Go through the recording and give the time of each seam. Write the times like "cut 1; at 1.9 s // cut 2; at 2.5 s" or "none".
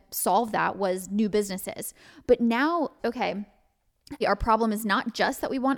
cut 1; at 3.0 s // cut 2; at 4.2 s